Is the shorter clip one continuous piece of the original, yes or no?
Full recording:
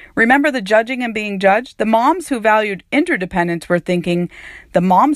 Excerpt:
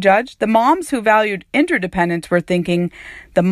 yes